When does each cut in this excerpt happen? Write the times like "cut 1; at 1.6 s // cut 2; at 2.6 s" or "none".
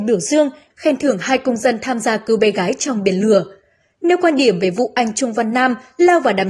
none